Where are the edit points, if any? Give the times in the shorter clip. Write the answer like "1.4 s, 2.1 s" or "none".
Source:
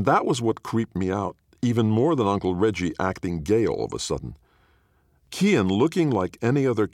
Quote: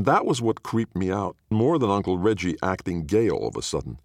1.5 s